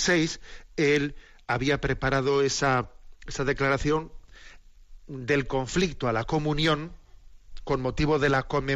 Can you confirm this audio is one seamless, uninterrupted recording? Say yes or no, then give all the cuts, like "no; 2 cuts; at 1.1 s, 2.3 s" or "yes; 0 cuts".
yes; 0 cuts